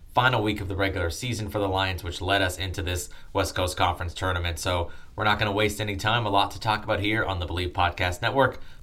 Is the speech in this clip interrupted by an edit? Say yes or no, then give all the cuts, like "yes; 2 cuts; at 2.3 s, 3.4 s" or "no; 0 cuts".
no; 0 cuts